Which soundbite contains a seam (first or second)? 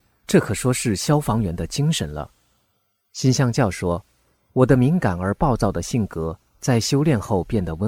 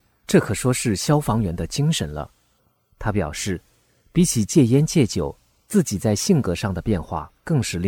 second